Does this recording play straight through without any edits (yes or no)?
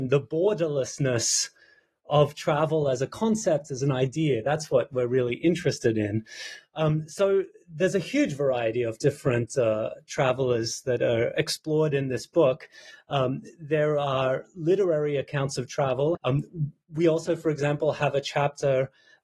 no